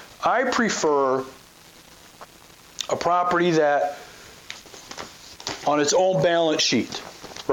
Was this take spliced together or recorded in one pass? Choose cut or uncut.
uncut